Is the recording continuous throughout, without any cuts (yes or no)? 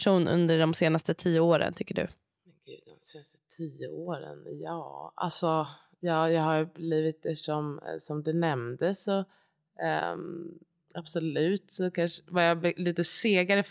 yes